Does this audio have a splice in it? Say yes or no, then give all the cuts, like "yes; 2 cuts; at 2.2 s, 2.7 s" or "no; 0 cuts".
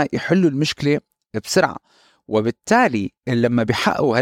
yes; 1 cut; at 3.2 s